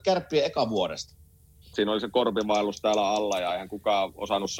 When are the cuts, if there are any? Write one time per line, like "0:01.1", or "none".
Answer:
0:01.7